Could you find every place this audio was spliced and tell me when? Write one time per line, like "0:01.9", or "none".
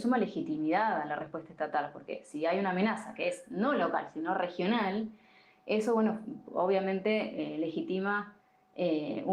none